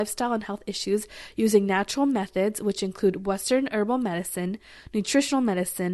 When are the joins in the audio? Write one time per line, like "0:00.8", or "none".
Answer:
none